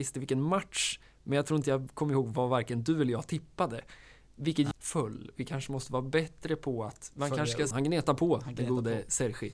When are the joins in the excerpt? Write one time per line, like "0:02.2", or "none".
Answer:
0:04.7
0:07.7

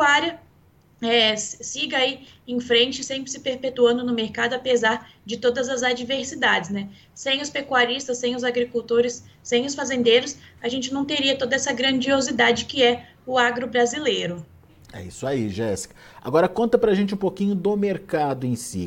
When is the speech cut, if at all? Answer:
none

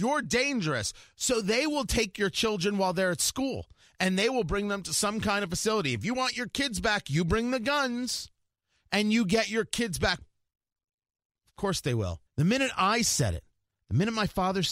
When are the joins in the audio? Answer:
0:10.2
0:12.3

